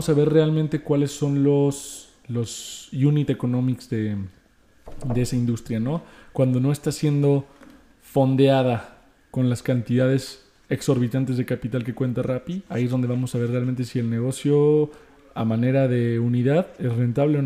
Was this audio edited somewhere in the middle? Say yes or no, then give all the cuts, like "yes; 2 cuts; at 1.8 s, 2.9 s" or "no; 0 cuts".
no; 0 cuts